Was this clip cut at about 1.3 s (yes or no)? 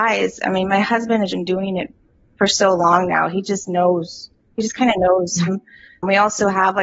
yes